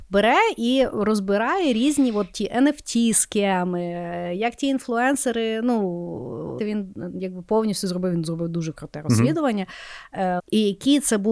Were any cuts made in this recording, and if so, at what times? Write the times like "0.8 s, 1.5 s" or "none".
6.6 s, 10.4 s